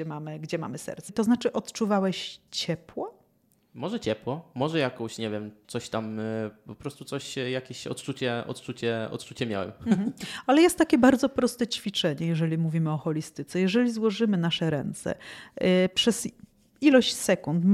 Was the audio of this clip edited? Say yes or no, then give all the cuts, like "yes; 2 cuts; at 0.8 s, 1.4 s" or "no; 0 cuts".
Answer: yes; 2 cuts; at 1.1 s, 5.6 s